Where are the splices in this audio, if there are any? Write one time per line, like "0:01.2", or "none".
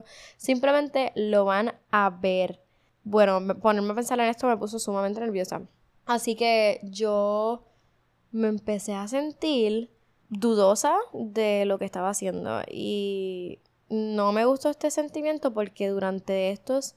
none